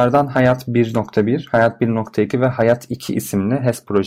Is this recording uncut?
yes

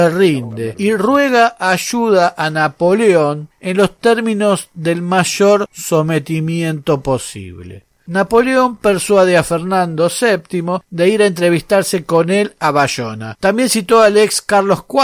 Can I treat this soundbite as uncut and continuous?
yes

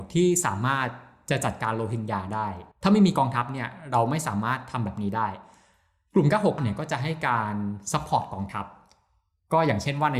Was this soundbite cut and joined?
yes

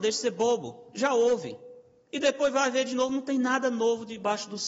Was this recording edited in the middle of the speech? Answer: no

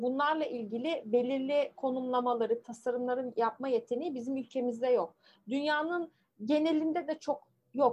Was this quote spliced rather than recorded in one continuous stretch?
yes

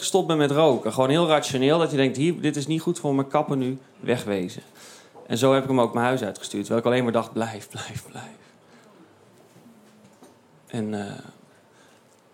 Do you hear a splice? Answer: no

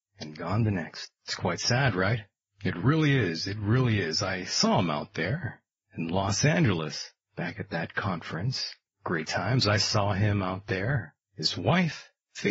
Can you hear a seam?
yes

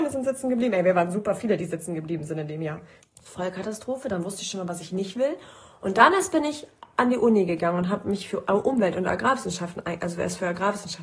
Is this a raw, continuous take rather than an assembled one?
no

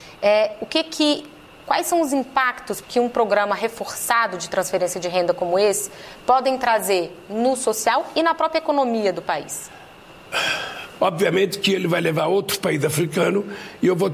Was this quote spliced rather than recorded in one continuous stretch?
yes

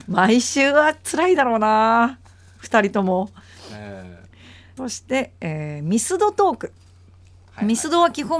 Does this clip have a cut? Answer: yes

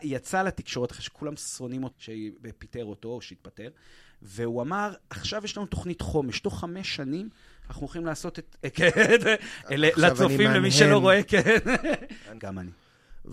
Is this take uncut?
no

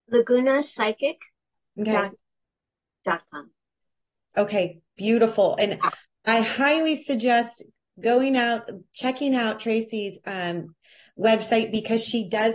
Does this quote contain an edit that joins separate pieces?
no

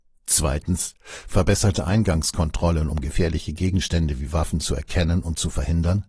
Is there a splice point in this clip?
no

